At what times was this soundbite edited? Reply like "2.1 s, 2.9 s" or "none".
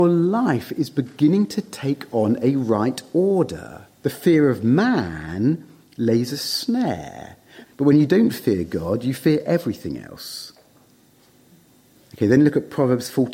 4.0 s, 7.6 s